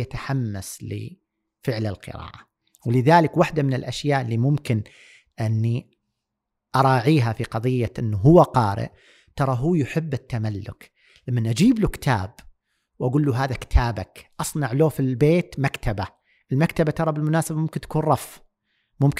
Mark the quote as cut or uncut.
uncut